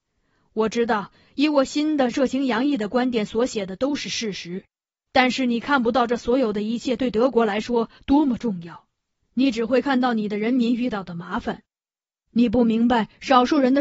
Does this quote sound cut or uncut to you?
uncut